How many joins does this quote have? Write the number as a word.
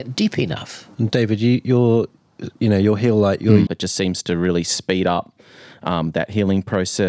one